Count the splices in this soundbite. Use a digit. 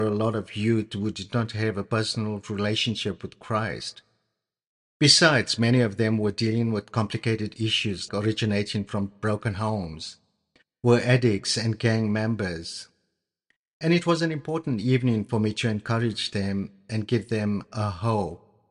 1